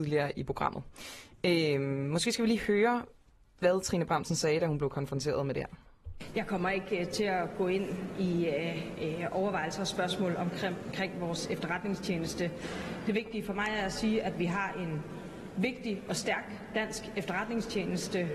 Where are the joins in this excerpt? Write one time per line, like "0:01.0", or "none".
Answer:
none